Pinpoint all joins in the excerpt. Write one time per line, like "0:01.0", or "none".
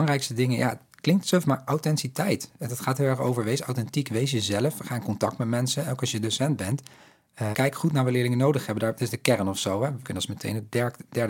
0:07.5
0:10.0